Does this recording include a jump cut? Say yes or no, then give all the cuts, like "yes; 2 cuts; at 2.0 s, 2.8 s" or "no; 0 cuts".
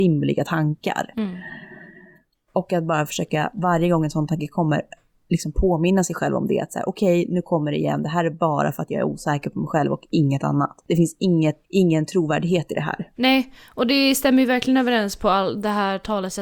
yes; 2 cuts; at 11.6 s, 13.2 s